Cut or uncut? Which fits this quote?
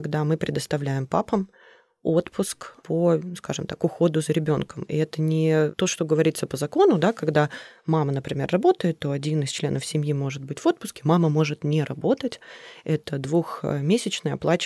uncut